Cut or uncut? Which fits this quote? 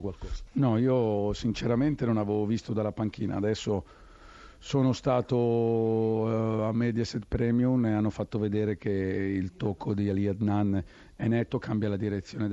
uncut